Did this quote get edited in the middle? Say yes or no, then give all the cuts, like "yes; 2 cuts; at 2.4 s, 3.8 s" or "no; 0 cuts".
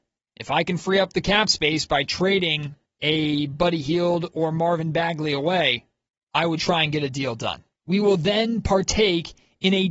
yes; 1 cut; at 7.8 s